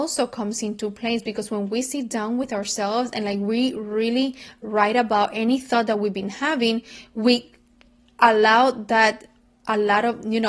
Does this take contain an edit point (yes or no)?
no